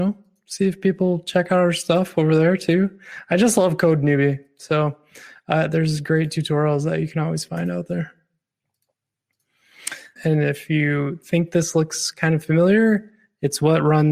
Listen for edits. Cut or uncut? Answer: cut